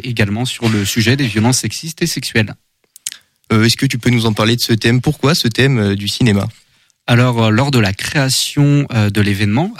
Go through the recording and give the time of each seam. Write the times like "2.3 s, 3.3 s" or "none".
3.4 s

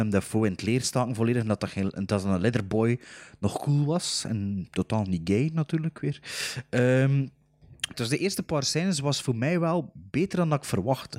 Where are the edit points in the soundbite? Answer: 7.9 s

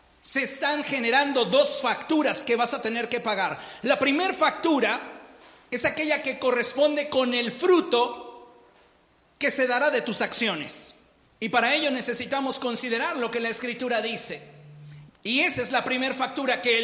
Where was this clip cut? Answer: 11.2 s, 15.1 s

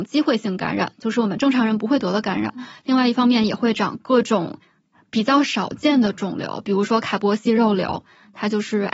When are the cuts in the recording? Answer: none

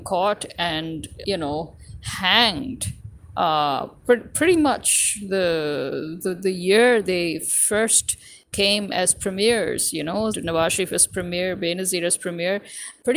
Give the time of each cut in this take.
1.2 s, 10.3 s

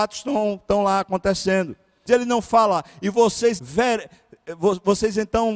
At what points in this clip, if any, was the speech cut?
2.1 s, 3.6 s

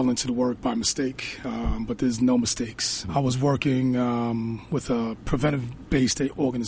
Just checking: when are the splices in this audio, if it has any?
3.0 s

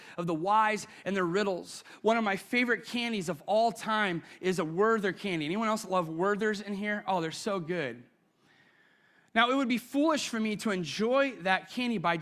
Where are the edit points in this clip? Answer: none

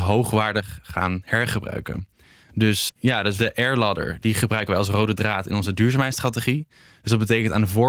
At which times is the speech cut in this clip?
2.9 s

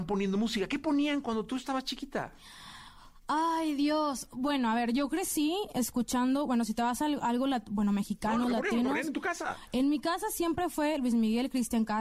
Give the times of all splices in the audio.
none

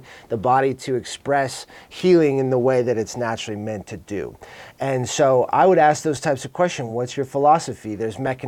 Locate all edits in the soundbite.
none

